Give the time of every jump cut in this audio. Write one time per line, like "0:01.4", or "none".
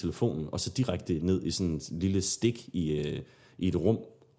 none